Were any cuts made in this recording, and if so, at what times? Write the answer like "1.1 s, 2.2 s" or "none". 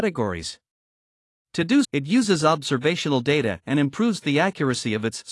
1.8 s